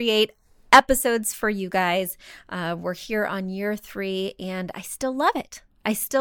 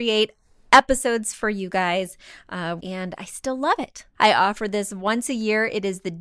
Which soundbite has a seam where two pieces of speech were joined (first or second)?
second